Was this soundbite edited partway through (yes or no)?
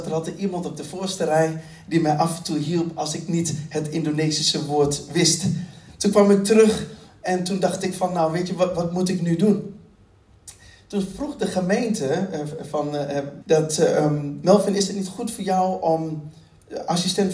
yes